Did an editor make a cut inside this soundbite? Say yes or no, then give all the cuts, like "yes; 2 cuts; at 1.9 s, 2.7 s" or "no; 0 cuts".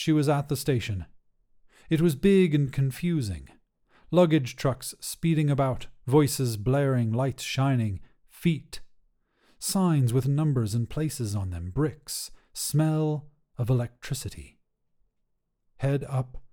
no; 0 cuts